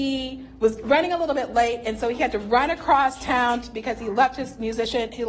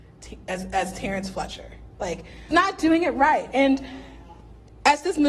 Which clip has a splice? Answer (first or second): second